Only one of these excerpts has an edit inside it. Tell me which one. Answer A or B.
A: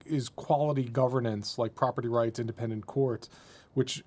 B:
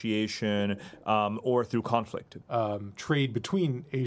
B